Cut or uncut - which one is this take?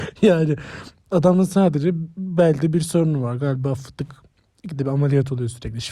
uncut